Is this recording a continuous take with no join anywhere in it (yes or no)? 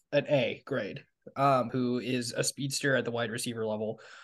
no